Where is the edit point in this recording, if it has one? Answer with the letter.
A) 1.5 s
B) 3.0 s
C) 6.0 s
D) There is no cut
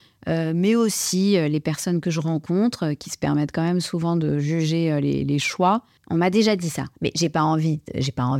C